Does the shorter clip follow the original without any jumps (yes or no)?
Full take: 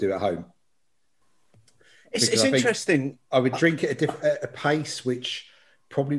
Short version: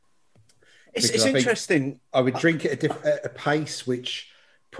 yes